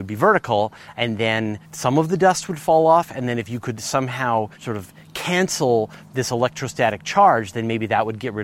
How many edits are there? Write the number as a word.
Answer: two